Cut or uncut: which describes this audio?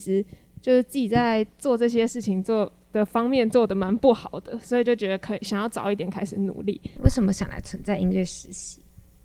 cut